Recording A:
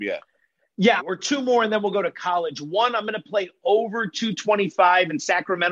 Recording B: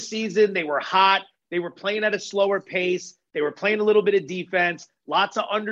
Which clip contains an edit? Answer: A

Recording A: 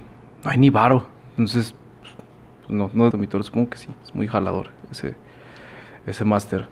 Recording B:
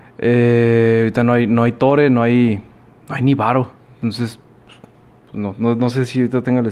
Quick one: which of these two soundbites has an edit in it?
A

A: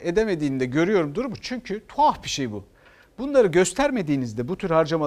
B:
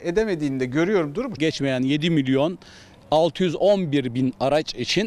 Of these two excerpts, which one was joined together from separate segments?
B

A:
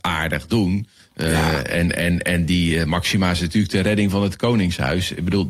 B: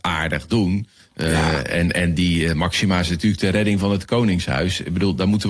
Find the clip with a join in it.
B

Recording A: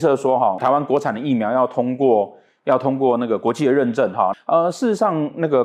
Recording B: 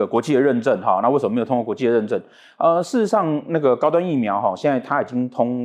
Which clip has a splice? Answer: A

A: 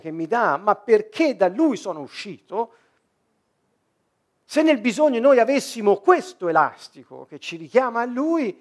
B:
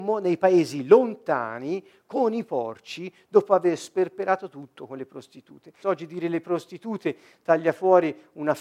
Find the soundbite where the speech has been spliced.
B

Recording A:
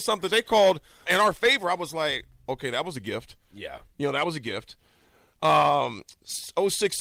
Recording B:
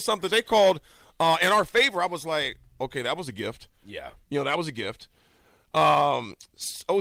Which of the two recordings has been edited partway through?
A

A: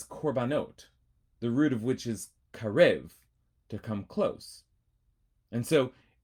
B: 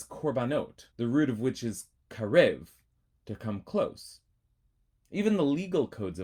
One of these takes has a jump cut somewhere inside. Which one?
B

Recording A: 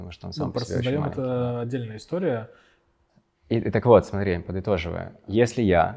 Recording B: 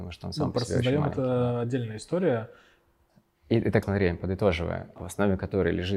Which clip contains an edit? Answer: B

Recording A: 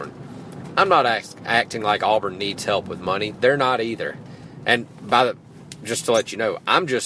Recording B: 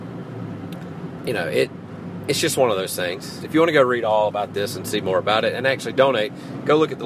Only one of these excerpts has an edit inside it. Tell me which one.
B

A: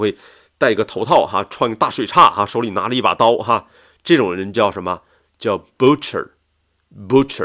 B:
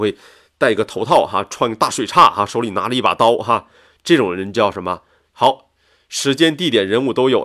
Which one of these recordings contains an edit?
B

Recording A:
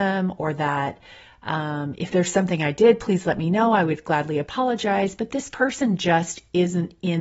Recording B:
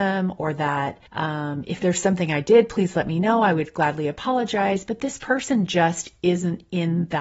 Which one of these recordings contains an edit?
B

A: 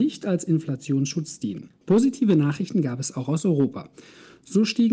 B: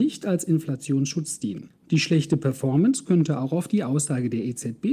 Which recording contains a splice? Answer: A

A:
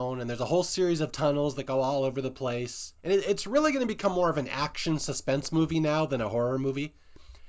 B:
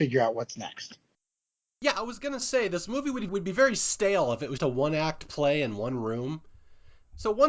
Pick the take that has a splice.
B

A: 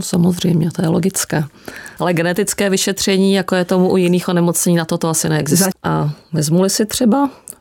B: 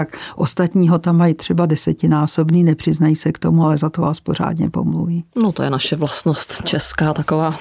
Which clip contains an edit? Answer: A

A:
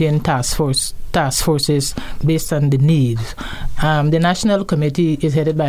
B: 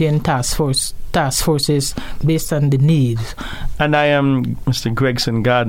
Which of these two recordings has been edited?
B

